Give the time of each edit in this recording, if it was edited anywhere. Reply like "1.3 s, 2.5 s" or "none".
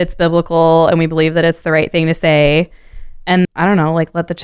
3.4 s